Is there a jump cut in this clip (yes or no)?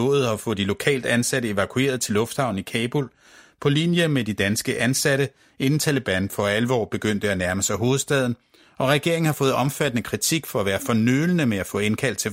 no